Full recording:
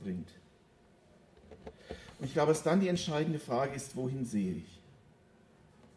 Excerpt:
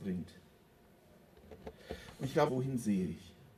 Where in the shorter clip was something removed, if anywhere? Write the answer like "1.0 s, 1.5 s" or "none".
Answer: 2.5 s